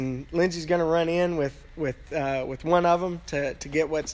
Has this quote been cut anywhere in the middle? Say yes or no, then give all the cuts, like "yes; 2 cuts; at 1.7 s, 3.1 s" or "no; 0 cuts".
no; 0 cuts